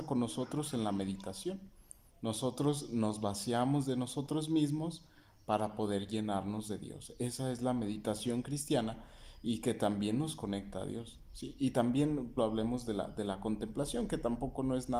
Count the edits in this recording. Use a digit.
1